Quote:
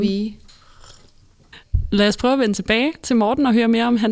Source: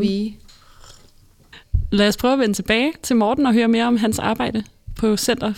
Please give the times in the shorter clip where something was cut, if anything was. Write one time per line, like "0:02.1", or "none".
none